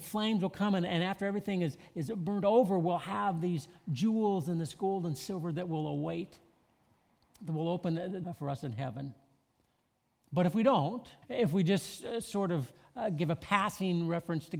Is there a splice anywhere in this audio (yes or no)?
yes